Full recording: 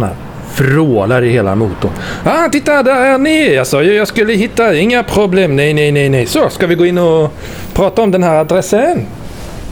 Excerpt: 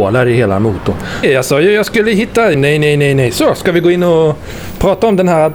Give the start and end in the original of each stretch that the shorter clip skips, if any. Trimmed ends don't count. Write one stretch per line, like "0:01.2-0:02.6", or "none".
0:02.2-0:03.5
0:04.8-0:05.5